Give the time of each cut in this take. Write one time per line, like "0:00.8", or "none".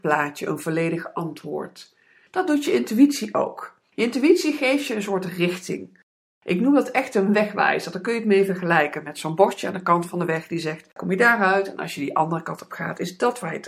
0:02.3
0:11.0